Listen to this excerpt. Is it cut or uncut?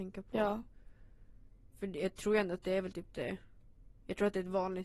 uncut